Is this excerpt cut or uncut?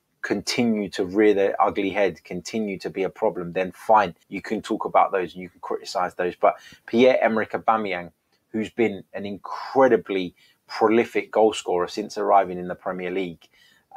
cut